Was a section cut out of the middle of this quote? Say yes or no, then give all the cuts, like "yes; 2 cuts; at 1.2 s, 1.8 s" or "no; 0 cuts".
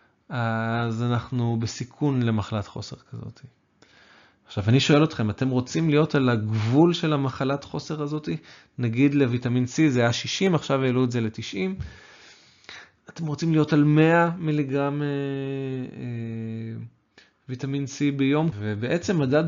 yes; 1 cut; at 18.5 s